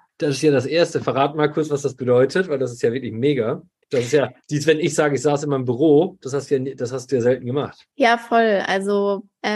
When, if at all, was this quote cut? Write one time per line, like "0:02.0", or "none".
none